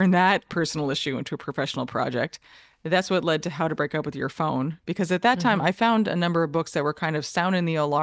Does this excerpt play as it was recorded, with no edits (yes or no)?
yes